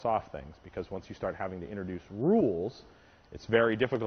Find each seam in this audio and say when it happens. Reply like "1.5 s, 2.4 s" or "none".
none